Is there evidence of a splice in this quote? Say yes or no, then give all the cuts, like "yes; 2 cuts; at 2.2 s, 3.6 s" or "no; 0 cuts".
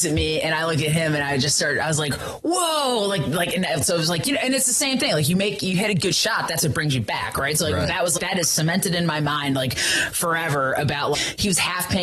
yes; 2 cuts; at 8.2 s, 11.1 s